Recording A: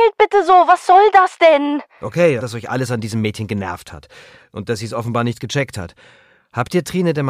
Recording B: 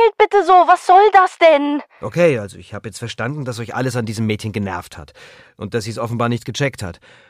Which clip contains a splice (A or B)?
A